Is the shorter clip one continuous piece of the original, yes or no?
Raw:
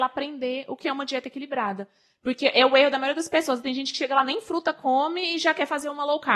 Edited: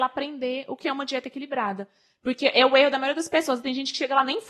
yes